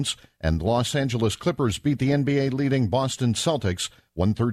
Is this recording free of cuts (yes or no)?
yes